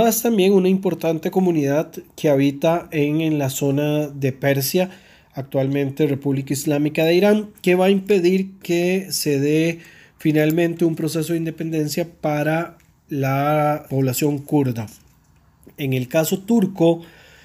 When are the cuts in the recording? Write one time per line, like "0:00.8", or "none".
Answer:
0:13.9